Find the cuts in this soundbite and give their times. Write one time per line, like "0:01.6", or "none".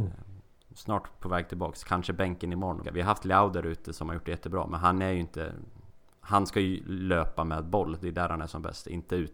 0:02.8